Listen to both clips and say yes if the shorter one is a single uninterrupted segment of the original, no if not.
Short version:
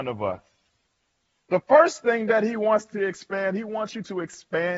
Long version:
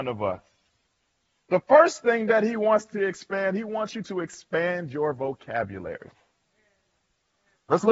yes